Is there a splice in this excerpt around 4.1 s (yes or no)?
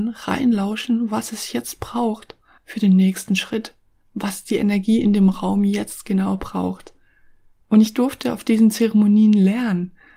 no